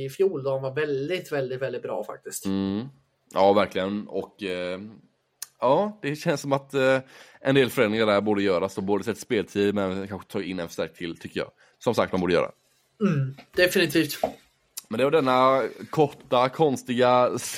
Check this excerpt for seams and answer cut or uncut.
uncut